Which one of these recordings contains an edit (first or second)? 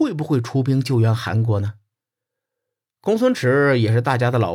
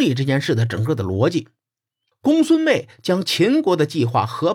second